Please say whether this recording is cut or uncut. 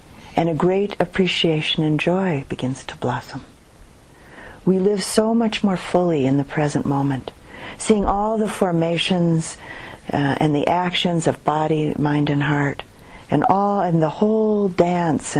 uncut